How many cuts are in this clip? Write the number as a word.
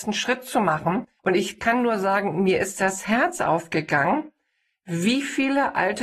one